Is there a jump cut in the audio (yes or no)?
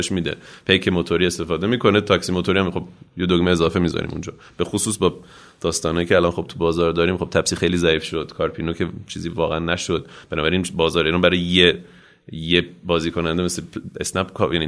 no